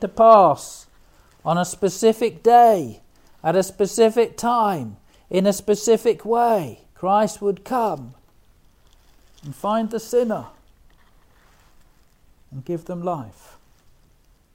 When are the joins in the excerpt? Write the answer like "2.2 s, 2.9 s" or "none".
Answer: 6.9 s